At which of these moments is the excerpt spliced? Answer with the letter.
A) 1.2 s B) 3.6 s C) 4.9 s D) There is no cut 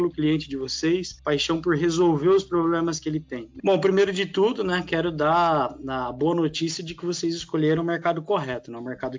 B